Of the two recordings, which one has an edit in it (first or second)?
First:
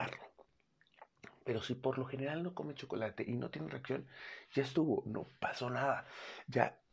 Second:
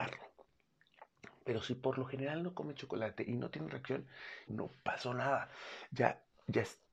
second